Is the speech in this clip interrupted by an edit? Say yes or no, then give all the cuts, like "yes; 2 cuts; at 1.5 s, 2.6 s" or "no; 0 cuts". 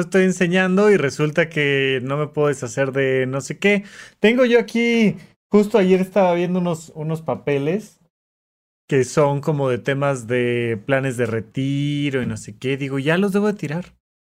no; 0 cuts